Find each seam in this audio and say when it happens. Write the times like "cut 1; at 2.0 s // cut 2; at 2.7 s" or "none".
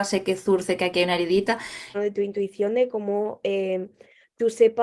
cut 1; at 1.9 s